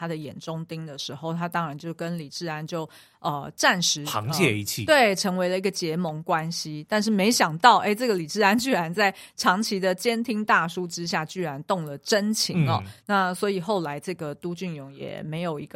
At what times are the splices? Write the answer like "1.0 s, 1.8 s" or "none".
none